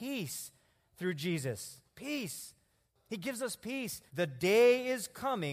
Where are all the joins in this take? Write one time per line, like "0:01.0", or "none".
0:04.1